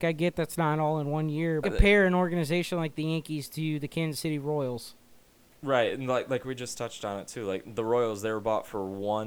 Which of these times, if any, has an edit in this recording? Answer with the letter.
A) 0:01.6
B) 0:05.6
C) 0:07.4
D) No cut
A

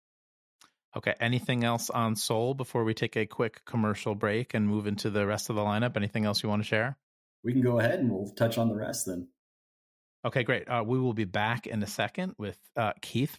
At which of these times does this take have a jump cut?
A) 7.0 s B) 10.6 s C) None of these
C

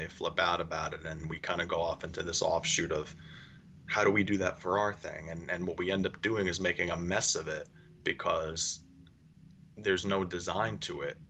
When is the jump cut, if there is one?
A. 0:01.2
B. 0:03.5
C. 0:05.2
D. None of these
A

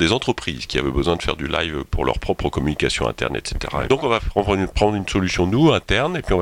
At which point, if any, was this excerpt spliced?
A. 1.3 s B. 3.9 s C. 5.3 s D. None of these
B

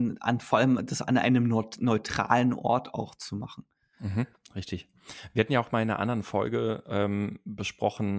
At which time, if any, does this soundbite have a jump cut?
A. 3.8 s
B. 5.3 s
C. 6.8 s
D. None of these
D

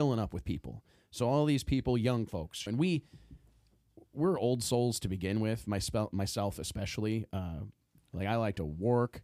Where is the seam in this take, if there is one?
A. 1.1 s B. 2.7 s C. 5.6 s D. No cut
B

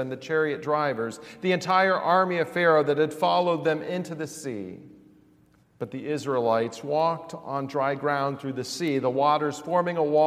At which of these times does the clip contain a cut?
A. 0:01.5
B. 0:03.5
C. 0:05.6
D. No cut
C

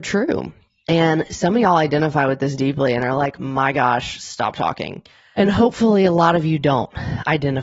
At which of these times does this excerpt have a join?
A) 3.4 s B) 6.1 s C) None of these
C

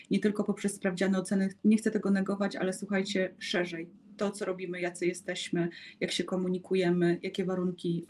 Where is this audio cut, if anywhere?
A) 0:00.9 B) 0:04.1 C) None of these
C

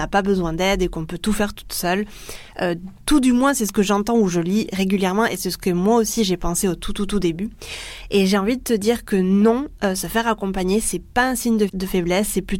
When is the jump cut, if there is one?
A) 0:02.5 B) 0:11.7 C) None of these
B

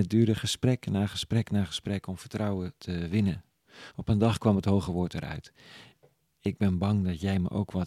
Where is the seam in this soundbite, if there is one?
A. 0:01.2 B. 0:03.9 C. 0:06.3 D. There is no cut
D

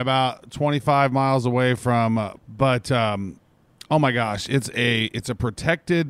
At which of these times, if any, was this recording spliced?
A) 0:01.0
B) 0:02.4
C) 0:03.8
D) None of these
B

